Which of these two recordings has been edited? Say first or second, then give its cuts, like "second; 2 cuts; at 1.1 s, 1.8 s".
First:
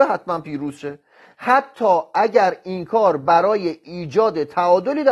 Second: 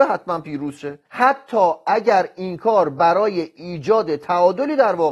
second; 1 cut; at 1.1 s